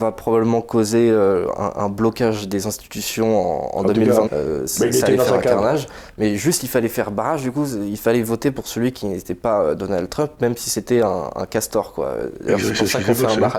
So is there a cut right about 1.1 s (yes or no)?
no